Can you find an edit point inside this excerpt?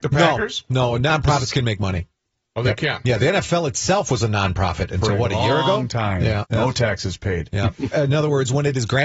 yes; 2 cuts; at 6.4 s, 7.9 s

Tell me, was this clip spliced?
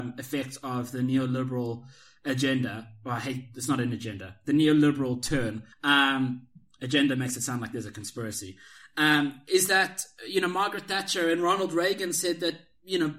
yes; 1 cut; at 5.7 s

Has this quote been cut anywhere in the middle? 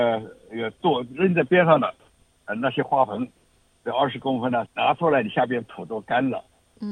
yes; 1 cut; at 4.7 s

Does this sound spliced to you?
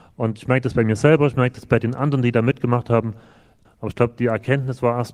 yes; 1 cut; at 3.7 s

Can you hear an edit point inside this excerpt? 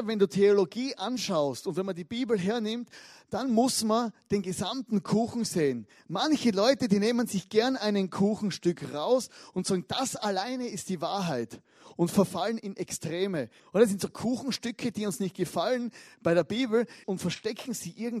yes; 2 cuts; at 13.6 s, 17.0 s

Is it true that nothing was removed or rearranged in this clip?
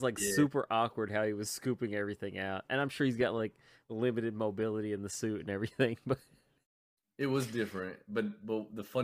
yes; 0 cuts

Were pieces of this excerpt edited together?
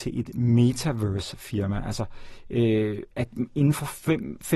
no; 0 cuts

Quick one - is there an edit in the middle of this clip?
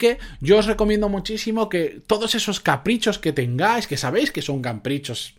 no; 0 cuts

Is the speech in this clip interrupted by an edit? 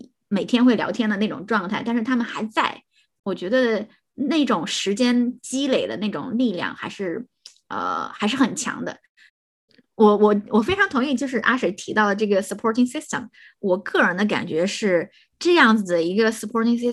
no; 0 cuts

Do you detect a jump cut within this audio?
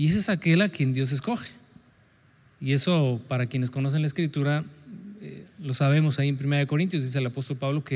no; 0 cuts

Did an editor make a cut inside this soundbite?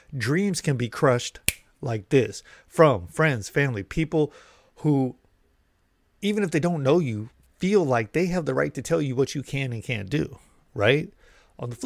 no; 0 cuts

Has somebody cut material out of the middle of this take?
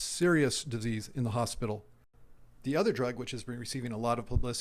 no; 0 cuts

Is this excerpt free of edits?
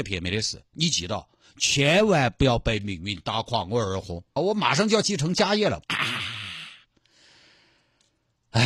no; 2 cuts; at 4.4 s, 5.8 s

